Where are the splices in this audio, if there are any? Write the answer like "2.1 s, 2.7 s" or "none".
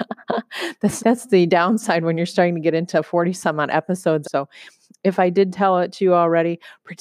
1.0 s, 4.2 s